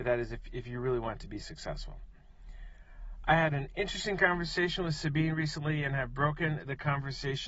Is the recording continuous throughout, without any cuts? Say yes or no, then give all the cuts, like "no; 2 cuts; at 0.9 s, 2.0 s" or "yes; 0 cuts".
yes; 0 cuts